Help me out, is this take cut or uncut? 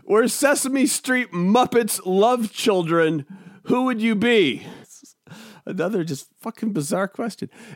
cut